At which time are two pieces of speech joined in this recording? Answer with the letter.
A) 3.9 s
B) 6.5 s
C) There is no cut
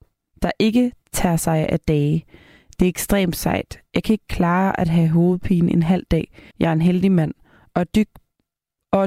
B